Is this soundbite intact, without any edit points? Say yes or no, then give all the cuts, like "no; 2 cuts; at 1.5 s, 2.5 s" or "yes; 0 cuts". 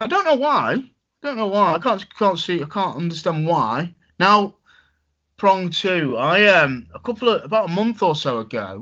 yes; 0 cuts